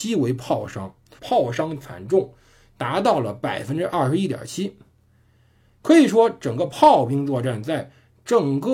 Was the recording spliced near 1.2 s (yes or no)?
yes